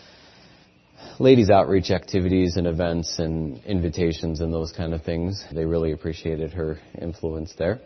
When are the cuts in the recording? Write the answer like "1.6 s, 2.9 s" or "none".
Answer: 5.5 s

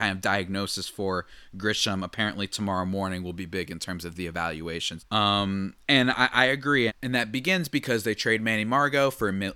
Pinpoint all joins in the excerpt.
5.0 s, 6.9 s

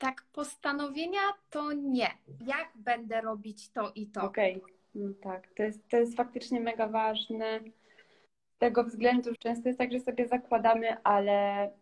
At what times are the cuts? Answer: 2.4 s, 9.4 s

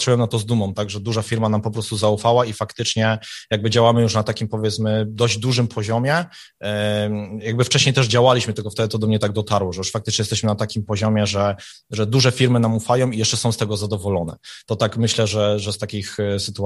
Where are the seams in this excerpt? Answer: none

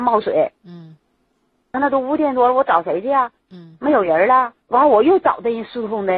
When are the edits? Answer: 1.7 s, 4.6 s

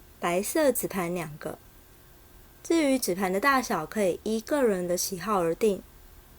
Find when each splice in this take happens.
none

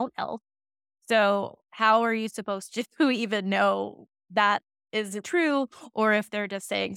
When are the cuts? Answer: 5.2 s

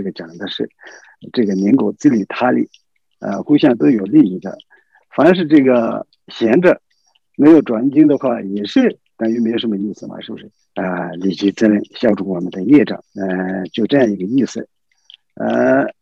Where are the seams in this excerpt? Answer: 10.6 s

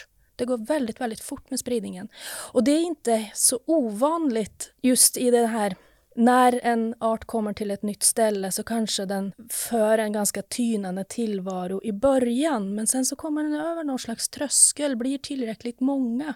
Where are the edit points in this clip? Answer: none

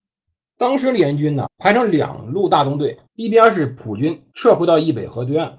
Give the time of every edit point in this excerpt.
1.5 s, 3.1 s, 4.3 s

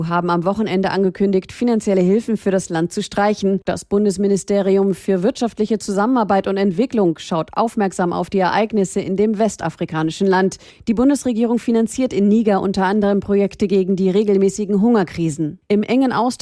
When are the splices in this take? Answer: none

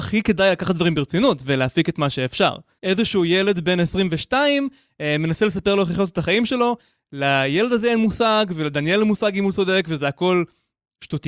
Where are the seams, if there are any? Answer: 2.8 s

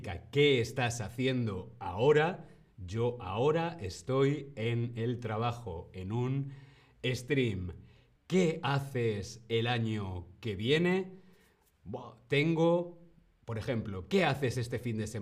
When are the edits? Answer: 8.2 s

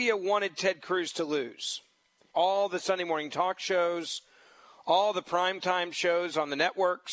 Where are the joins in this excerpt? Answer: 2.3 s

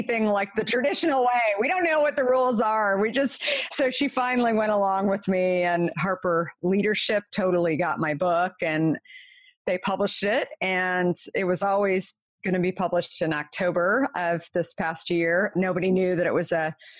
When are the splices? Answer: none

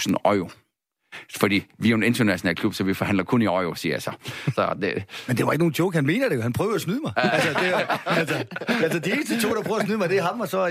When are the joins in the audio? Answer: 4.6 s

